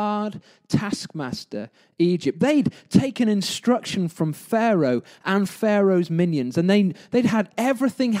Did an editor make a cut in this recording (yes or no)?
no